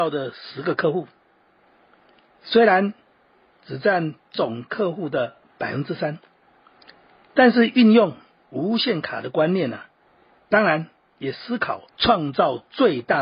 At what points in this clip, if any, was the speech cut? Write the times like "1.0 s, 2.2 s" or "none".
10.4 s, 11.9 s